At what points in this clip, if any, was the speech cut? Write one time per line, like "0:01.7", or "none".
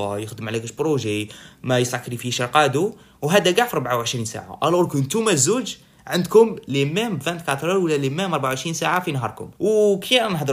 0:09.5